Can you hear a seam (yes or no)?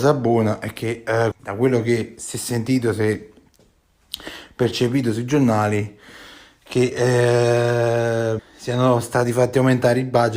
yes